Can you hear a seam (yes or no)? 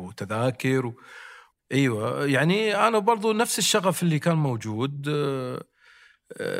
yes